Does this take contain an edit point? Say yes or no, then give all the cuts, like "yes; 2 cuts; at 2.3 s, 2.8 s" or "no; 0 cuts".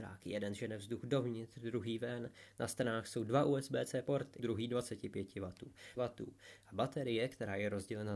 yes; 2 cuts; at 4.4 s, 6.0 s